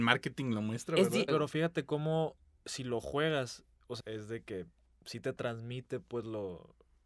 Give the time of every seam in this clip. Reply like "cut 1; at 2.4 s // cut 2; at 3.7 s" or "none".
cut 1; at 1.3 s // cut 2; at 4.0 s